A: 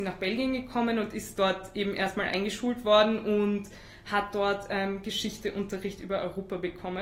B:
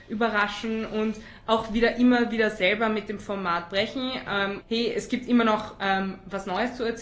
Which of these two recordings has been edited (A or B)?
B